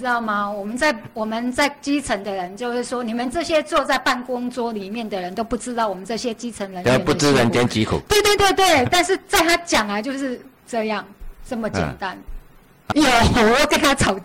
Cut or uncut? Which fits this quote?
cut